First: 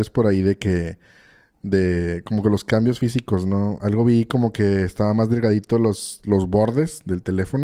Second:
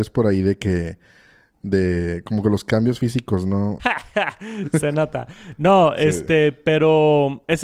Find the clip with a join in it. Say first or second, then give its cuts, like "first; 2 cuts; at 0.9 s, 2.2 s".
second; 1 cut; at 3.8 s